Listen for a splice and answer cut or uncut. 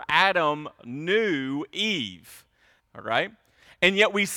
cut